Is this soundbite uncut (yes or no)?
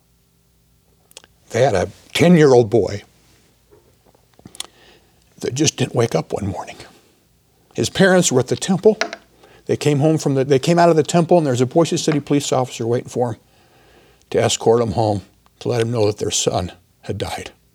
yes